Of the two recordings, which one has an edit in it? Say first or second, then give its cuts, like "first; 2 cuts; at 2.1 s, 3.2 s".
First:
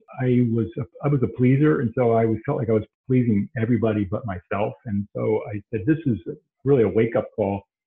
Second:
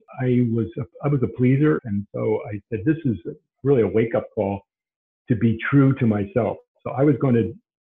second; 1 cut; at 1.8 s